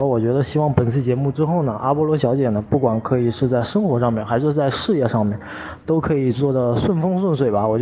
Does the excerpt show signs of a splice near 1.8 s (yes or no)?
no